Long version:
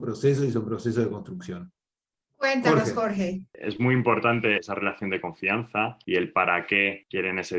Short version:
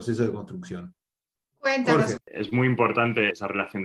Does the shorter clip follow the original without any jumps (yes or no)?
no